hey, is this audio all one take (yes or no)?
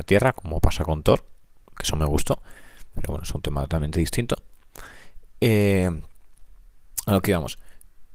no